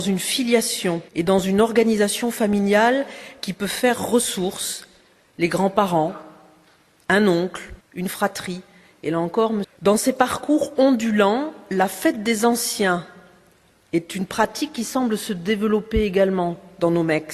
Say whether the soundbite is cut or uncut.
cut